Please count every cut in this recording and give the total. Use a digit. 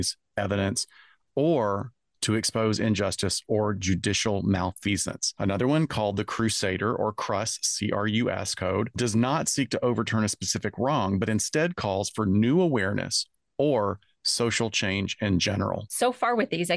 0